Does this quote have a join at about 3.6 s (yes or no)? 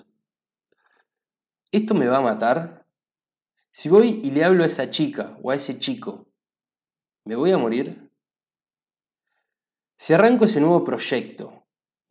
no